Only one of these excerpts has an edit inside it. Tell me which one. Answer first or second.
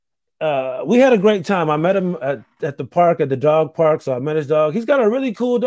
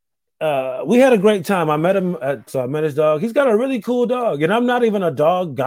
second